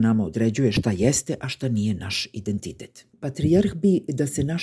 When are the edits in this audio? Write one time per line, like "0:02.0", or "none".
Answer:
0:03.1

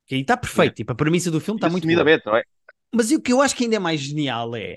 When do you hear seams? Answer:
0:02.7

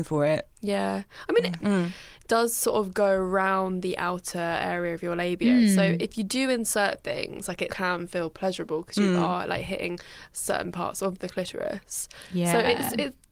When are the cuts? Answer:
0:01.6
0:07.7

